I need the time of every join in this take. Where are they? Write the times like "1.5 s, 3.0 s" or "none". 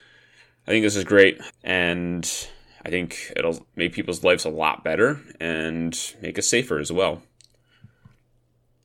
1.5 s, 3.7 s